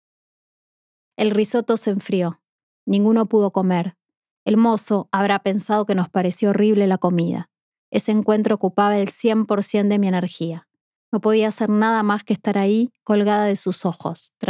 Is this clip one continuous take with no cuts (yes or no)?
yes